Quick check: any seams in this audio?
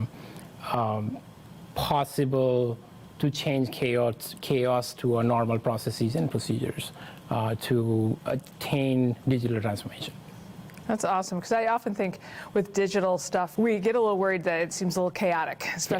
yes; 2 cuts; at 13.5 s, 14.7 s

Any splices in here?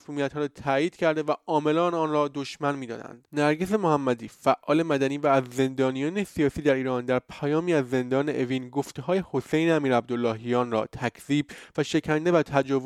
yes; 1 cut; at 3.2 s

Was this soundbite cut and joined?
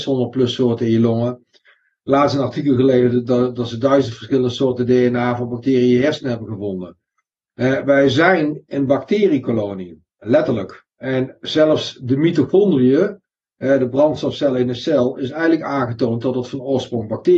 no; 0 cuts

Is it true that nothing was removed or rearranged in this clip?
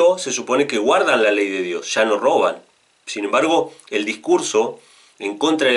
yes; 0 cuts

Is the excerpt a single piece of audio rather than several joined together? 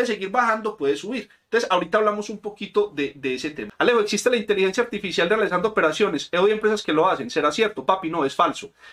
yes; 0 cuts

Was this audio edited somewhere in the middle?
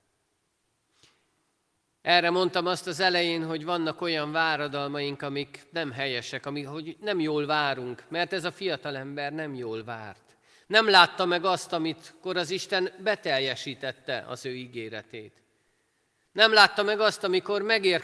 no; 0 cuts

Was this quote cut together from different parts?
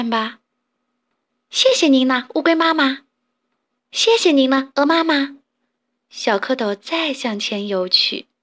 yes; 1 cut; at 3.8 s

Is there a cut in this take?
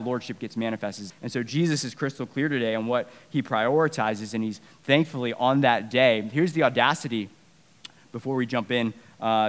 yes; 1 cut; at 1.1 s

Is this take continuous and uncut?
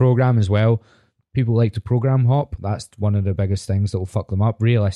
yes; 0 cuts

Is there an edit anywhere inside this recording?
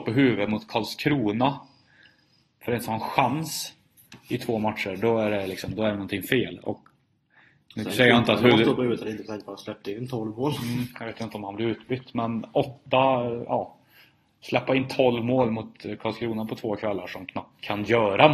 no; 0 cuts

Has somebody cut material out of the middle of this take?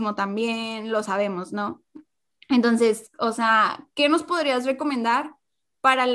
no; 0 cuts

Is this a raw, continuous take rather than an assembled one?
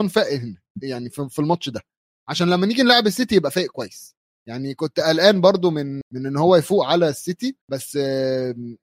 no; 2 cuts; at 6.0 s, 7.6 s

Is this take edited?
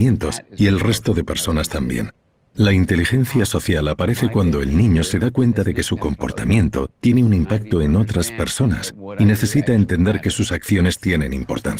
yes; 1 cut; at 2.5 s

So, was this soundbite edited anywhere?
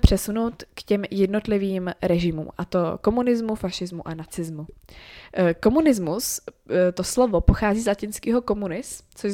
no; 0 cuts

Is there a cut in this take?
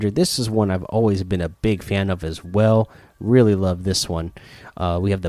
no; 0 cuts

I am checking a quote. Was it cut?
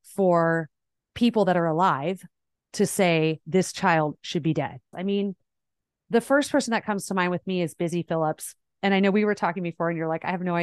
yes; 2 cuts; at 3.4 s, 4.9 s

